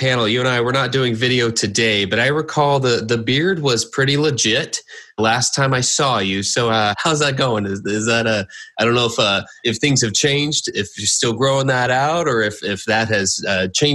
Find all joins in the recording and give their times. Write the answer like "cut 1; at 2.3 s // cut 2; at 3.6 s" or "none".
none